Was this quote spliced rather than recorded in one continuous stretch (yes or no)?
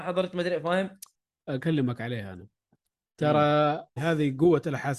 yes